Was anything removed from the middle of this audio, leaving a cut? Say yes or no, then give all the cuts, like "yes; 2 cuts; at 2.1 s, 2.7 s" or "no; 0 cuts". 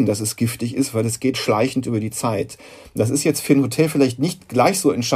yes; 1 cut; at 1.3 s